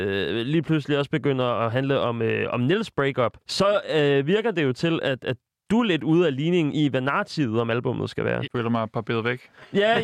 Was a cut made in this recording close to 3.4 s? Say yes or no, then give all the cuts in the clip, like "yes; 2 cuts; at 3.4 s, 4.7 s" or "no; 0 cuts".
yes; 2 cuts; at 3.4 s, 8.5 s